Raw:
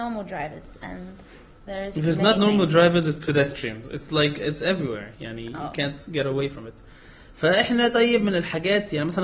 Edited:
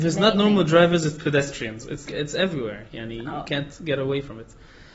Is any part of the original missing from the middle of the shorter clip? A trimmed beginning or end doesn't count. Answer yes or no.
yes